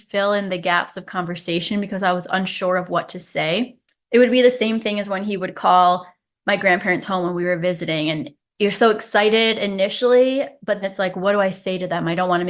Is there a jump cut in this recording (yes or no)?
yes